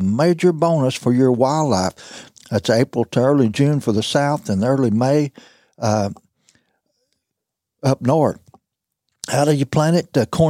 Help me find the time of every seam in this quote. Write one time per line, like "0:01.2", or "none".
0:02.3